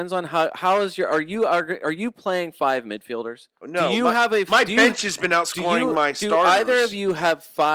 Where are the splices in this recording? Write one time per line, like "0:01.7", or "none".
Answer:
0:03.6